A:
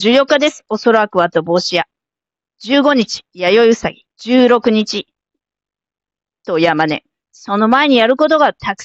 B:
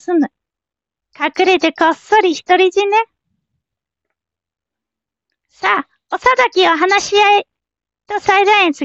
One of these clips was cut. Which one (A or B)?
A